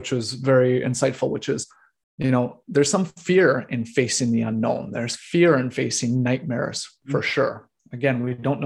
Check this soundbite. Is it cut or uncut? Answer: uncut